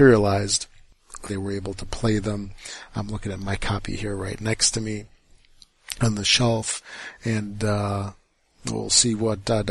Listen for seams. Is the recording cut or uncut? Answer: cut